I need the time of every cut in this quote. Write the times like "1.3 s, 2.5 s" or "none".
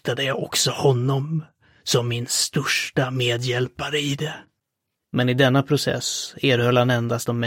5.0 s